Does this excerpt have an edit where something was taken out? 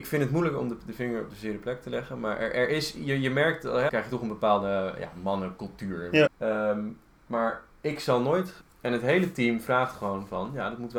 yes; 3 cuts; at 3.9 s, 6.3 s, 8.6 s

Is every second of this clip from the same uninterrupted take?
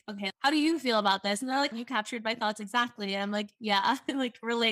no; 1 cut; at 1.7 s

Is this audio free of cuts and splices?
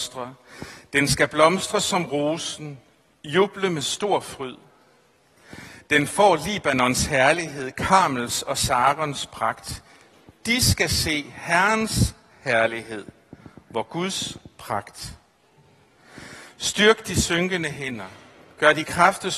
yes; 0 cuts

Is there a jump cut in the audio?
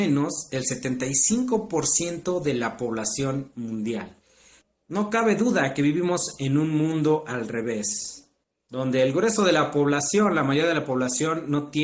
no; 0 cuts

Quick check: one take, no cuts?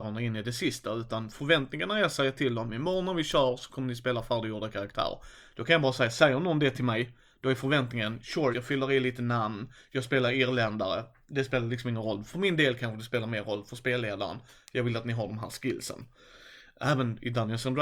no; 1 cut; at 8.5 s

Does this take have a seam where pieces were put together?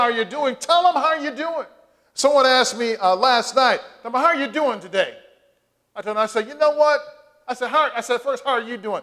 no; 0 cuts

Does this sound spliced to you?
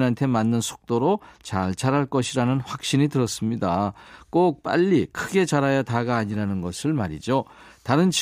no; 0 cuts

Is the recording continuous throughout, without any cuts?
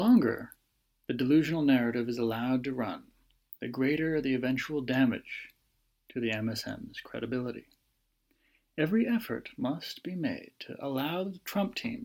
yes; 0 cuts

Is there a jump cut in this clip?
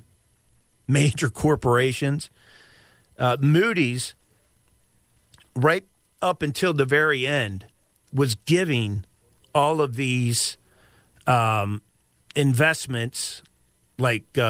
no; 0 cuts

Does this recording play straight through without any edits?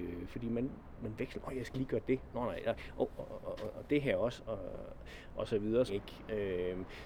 no; 2 cuts; at 3.4 s, 5.9 s

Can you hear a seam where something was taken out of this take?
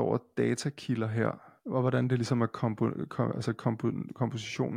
no; 0 cuts

